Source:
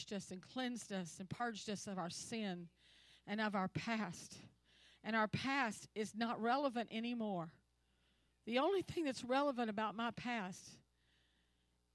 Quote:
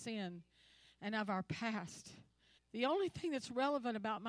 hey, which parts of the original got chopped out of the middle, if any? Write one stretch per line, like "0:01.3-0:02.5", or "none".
0:04.8-0:08.3